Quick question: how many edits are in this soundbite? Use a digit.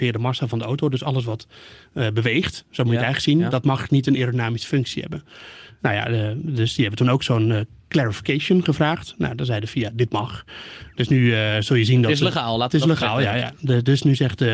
1